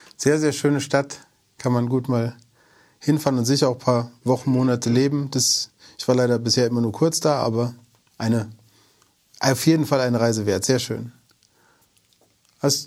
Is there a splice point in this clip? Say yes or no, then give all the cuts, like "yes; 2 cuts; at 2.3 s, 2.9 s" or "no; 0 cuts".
no; 0 cuts